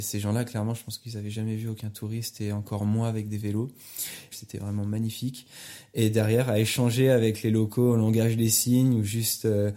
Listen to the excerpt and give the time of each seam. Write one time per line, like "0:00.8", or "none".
0:04.3